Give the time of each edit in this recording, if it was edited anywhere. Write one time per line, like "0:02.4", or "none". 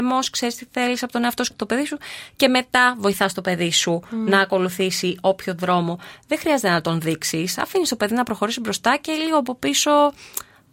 0:01.5